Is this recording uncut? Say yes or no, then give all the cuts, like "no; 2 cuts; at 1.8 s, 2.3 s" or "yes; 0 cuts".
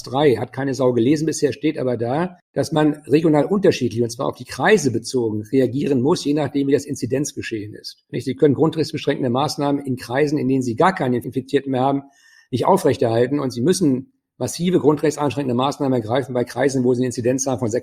no; 1 cut; at 8.1 s